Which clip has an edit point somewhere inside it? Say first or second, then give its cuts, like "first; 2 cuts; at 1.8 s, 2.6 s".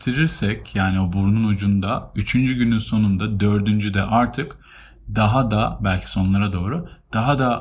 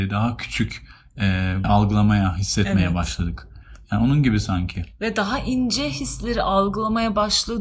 second; 1 cut; at 1.6 s